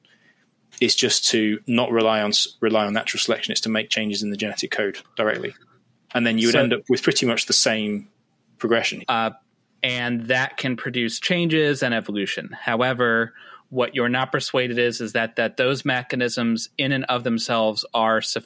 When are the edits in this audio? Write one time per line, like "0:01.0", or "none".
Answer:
0:09.0